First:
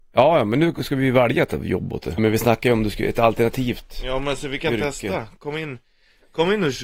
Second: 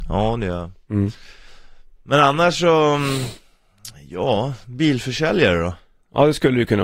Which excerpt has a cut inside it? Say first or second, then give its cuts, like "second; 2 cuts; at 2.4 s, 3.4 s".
first; 1 cut; at 2.2 s